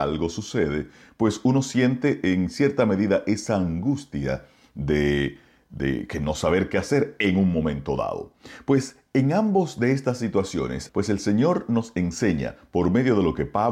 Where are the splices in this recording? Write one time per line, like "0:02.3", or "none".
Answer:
0:10.9